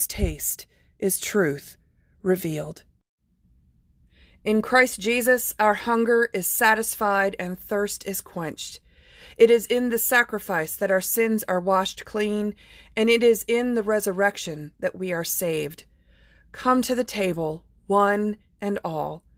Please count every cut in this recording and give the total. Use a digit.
0